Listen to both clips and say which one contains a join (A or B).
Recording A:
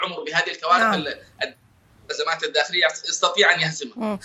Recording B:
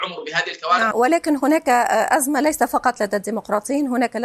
B